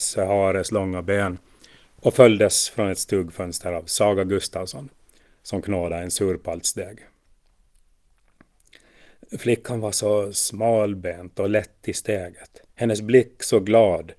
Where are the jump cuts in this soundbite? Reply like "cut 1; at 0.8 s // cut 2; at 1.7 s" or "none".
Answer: cut 1; at 12.7 s